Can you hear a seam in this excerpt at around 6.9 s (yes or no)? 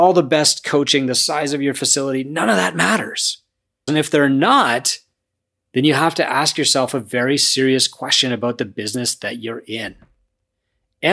no